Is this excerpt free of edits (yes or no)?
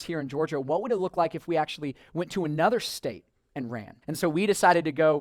no